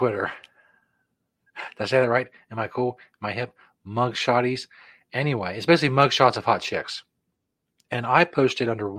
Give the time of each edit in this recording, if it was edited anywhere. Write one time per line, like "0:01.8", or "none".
none